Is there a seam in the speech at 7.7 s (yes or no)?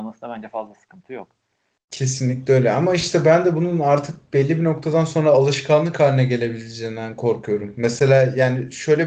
no